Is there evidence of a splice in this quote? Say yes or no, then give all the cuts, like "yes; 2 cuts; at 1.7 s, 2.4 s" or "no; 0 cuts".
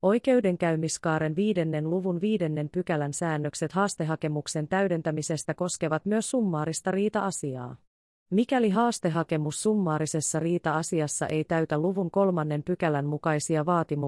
no; 0 cuts